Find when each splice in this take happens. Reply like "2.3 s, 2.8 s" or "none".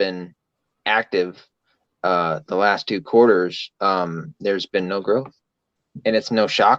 none